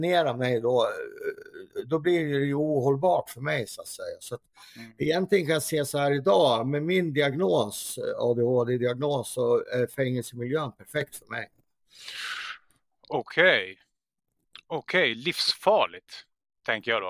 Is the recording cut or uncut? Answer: uncut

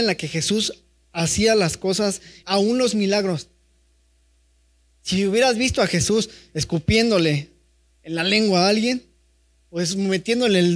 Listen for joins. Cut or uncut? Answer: cut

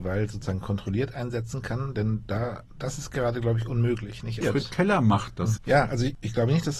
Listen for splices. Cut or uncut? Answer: cut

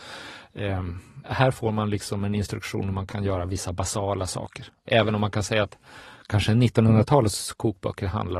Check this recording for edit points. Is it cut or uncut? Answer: cut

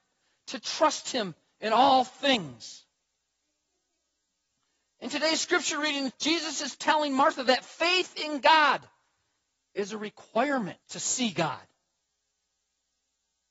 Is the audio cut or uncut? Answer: cut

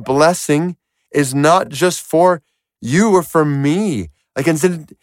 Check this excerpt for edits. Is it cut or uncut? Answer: uncut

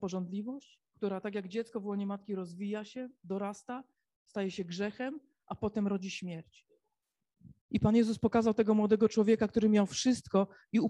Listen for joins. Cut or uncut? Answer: cut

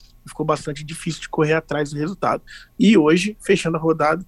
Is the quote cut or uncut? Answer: cut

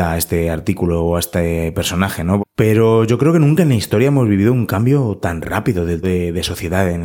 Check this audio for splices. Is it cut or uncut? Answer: cut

